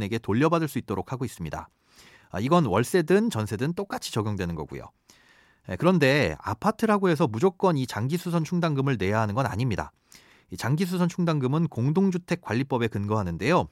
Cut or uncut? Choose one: uncut